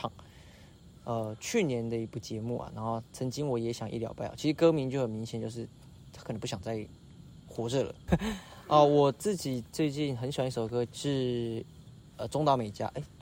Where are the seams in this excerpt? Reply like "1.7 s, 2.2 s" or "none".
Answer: 8.1 s, 10.9 s